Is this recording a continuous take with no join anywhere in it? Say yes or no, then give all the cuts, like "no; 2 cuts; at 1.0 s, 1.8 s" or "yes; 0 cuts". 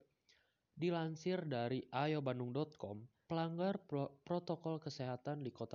no; 1 cut; at 3.3 s